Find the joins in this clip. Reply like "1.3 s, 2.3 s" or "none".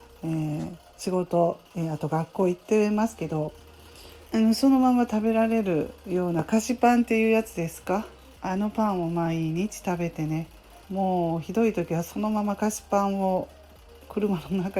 1.7 s, 4.3 s, 10.8 s